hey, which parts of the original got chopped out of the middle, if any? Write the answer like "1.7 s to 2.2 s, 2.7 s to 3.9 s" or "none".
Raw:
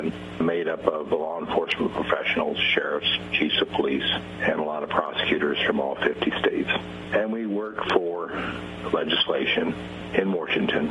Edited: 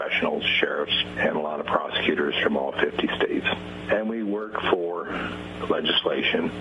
3.3 s to 4.4 s